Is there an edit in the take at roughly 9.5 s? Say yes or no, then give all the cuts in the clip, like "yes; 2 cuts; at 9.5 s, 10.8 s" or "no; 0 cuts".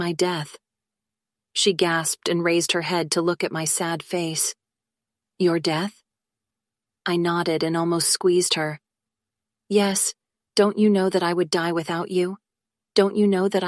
no; 0 cuts